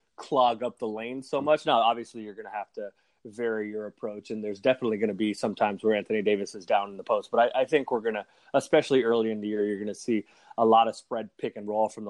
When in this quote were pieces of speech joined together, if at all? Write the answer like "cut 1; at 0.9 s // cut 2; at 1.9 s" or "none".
none